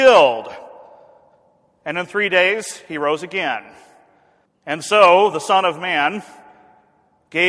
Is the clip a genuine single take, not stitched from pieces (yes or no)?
yes